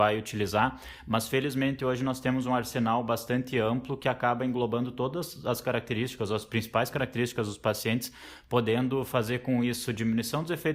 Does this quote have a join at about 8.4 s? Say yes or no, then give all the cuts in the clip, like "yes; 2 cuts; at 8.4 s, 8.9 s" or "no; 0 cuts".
no; 0 cuts